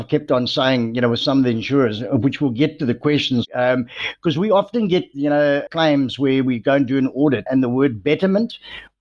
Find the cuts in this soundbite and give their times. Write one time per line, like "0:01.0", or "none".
0:05.7
0:07.5